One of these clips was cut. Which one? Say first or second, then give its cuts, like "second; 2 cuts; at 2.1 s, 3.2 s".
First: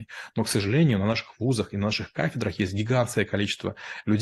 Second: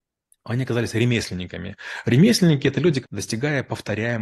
second; 1 cut; at 3.0 s